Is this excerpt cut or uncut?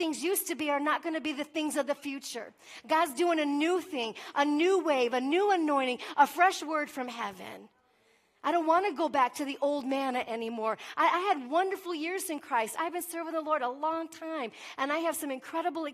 uncut